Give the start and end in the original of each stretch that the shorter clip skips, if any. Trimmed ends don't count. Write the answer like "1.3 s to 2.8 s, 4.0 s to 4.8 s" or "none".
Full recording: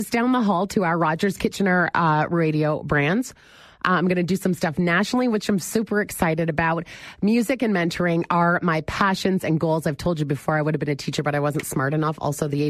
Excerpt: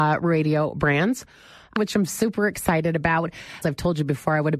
3.8 s to 5.3 s, 7.2 s to 9.8 s

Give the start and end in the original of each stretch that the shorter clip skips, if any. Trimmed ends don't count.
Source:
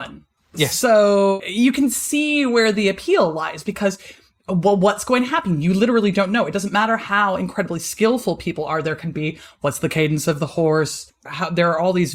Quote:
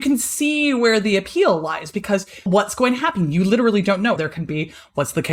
4.2 s to 4.8 s, 6.5 s to 8.8 s

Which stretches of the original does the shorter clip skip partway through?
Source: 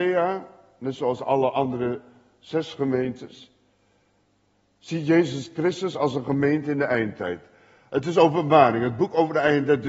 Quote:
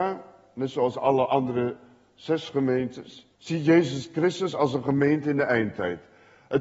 3.6 s to 4.8 s

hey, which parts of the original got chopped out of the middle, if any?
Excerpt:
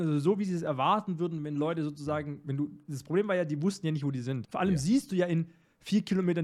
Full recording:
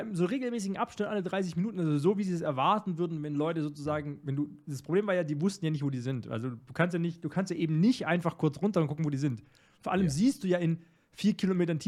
6.2 s to 9.8 s

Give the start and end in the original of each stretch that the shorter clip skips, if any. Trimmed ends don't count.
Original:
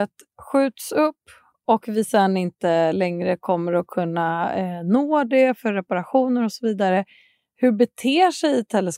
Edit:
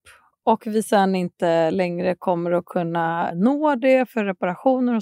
4.5 s to 4.8 s

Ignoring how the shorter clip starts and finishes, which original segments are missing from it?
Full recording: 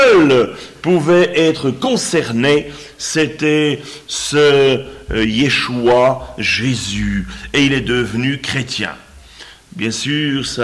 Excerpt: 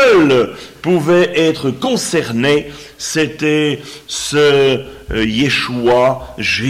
none

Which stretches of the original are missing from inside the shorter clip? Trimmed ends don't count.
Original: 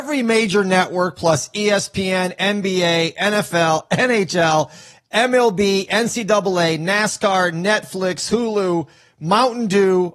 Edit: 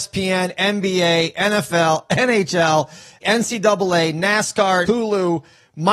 5.0 s to 5.9 s, 7.5 s to 8.3 s

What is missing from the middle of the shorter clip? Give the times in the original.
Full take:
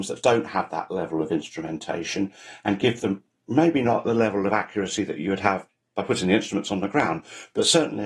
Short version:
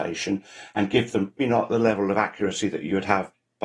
3.3 s to 3.7 s

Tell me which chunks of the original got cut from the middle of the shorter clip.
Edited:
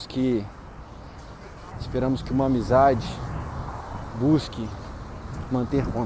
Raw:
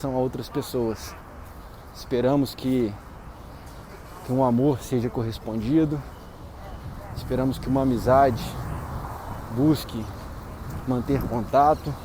4.2 s to 7.1 s

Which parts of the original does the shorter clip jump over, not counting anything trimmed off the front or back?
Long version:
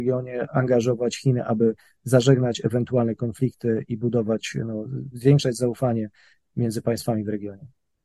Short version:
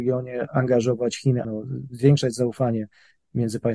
1.4 s to 4.7 s

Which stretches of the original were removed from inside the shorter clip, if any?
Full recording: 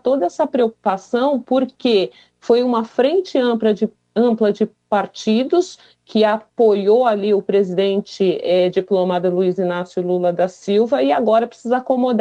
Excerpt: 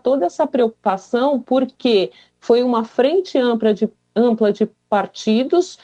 none

